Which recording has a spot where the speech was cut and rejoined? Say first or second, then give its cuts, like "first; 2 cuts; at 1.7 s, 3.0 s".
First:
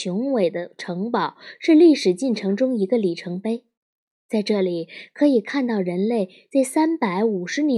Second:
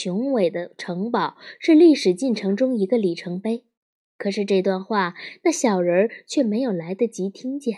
second; 1 cut; at 4.0 s